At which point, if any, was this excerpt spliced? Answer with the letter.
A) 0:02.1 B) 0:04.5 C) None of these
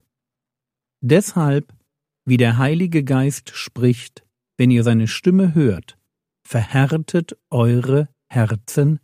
B